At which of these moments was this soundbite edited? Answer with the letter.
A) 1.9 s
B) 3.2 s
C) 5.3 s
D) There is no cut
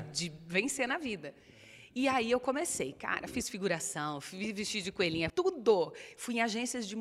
C